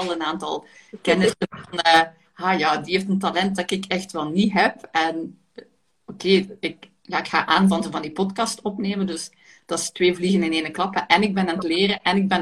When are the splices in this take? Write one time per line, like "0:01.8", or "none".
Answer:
none